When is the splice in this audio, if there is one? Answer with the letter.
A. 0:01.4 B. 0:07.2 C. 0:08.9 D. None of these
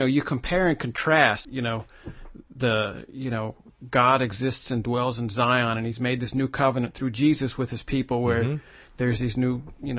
A